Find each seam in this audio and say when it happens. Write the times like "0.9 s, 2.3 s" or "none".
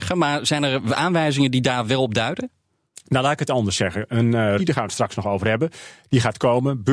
4.6 s